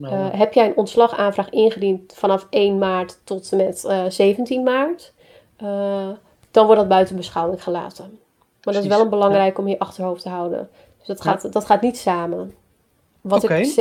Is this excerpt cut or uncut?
uncut